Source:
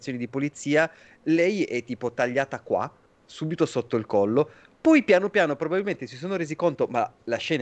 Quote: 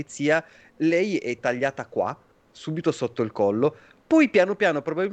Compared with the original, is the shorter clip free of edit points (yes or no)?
no